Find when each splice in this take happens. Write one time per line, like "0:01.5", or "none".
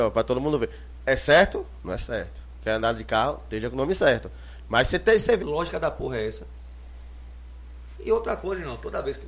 0:05.4